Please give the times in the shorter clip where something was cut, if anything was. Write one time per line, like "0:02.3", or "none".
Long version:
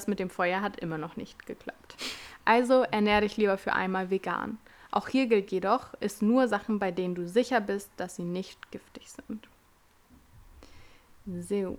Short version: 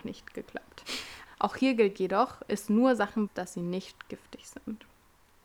0:01.3
0:03.3